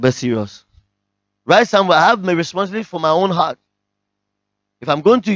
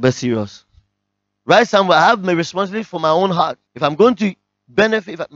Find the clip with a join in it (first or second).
second